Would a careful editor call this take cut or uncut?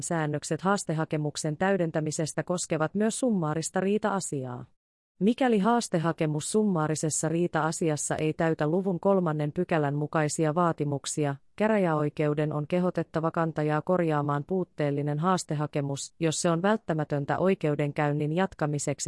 uncut